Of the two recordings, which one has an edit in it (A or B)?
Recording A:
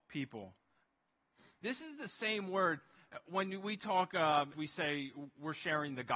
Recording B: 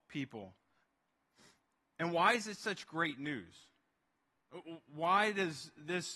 A